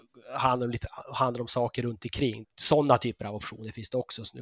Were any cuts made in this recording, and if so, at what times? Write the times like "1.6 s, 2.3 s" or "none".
2.4 s